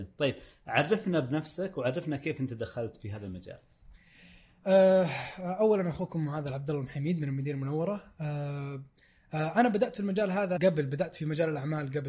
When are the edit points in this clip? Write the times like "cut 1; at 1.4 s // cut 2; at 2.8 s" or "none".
cut 1; at 10.6 s